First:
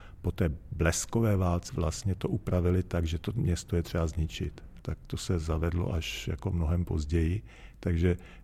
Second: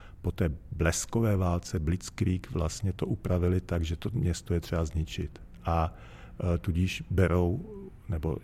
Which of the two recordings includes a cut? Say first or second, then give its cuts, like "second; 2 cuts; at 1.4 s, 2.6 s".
first; 2 cuts; at 1.7 s, 4.8 s